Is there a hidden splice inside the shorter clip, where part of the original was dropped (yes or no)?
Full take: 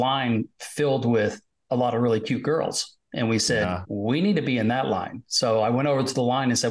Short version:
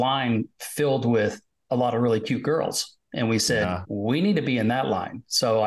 no